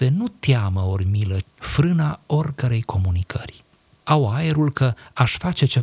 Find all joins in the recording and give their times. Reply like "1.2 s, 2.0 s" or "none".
1.4 s